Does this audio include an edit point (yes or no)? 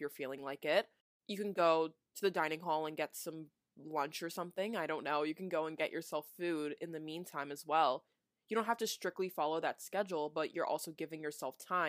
no